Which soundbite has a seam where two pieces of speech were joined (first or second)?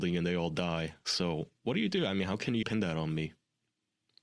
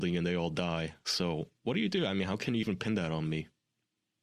first